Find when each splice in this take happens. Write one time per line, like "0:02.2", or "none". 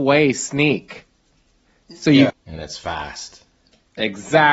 0:02.3